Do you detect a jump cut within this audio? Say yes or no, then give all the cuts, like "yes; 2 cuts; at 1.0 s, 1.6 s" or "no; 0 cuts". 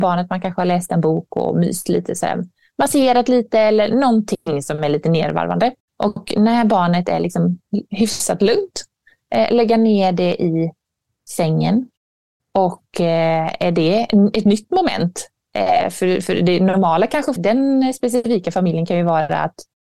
yes; 1 cut; at 17.4 s